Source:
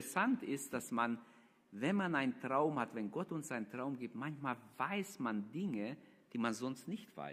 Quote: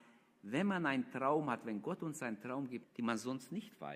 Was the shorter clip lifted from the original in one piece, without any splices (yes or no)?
no